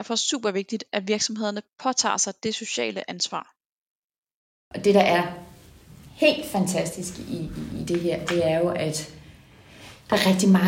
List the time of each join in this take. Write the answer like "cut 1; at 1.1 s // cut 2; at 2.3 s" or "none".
none